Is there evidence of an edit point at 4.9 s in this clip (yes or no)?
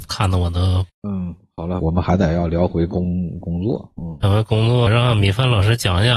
yes